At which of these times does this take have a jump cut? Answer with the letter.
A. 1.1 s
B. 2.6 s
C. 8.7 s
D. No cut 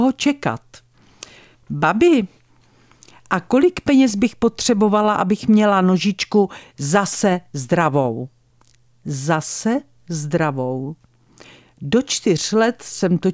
D